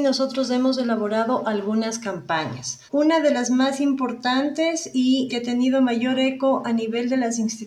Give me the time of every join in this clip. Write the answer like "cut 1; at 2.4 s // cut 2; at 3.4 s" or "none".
cut 1; at 2.9 s // cut 2; at 5.3 s